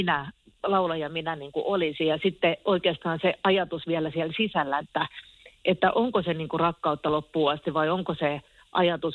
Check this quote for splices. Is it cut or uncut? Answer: cut